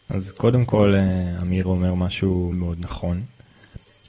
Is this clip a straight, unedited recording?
no; 1 cut; at 2.5 s

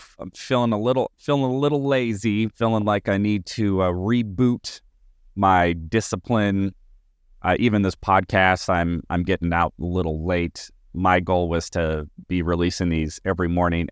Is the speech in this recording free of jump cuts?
yes; 0 cuts

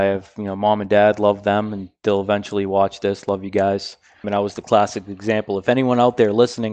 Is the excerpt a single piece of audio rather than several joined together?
no; 1 cut; at 4.2 s

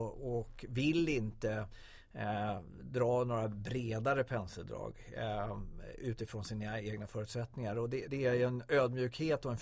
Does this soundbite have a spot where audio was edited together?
no; 0 cuts

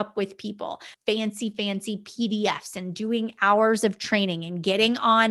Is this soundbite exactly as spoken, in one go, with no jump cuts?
no; 1 cut; at 0.9 s

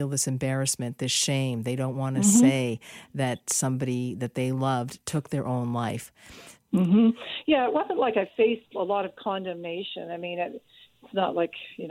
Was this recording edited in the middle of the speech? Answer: yes; 1 cut; at 6.6 s

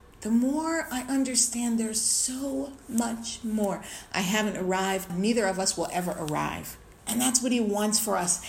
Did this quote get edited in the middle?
yes; 2 cuts; at 5.1 s, 7.0 s

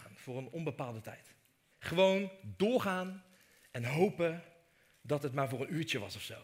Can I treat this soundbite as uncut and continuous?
no; 1 cut; at 1.7 s

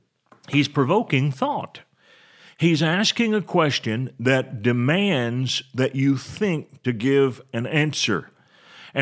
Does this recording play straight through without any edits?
yes; 0 cuts

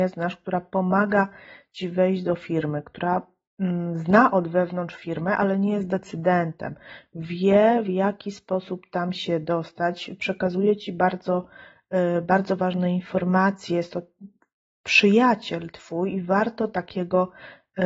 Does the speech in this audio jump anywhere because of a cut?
no; 0 cuts

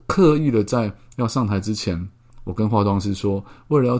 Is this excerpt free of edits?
yes; 0 cuts

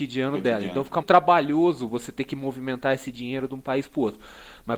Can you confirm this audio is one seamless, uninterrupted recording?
no; 1 cut; at 1.0 s

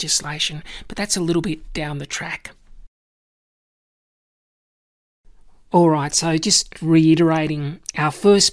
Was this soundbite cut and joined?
no; 0 cuts

